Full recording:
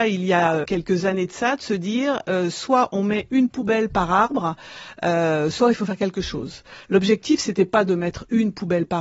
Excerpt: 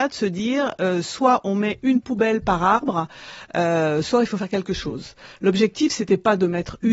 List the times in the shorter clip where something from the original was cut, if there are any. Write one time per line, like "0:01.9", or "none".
none